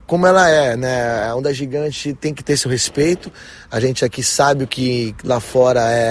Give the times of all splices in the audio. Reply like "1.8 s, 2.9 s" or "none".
none